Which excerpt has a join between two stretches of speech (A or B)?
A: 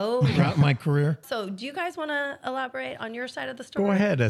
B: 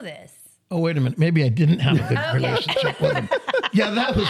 A